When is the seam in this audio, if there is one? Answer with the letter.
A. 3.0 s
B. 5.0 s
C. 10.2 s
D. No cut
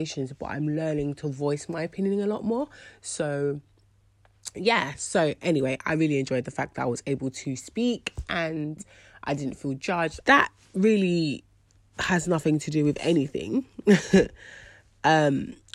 C